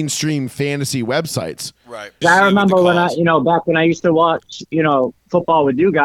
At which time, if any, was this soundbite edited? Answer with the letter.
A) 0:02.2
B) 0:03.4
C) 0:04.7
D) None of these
A